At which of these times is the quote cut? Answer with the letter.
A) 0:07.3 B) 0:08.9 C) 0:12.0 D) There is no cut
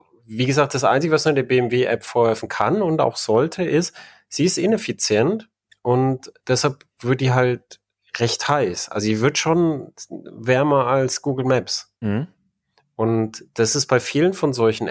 C